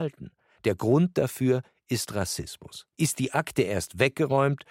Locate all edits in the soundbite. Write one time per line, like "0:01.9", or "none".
0:02.9